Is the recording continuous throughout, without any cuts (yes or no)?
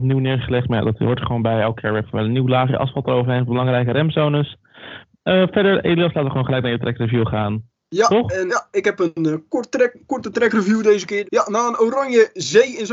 no